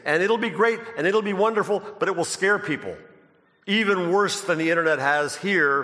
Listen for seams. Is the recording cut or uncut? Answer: uncut